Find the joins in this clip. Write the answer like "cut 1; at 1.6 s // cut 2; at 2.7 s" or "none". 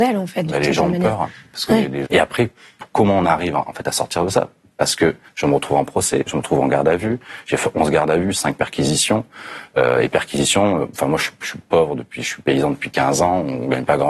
cut 1; at 2.0 s